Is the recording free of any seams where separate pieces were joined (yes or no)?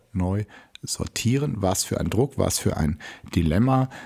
yes